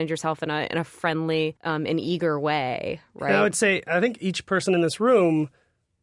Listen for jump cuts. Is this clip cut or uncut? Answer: cut